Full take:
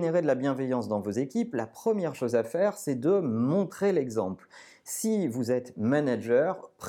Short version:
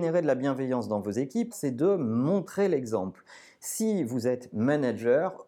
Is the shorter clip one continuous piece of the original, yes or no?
no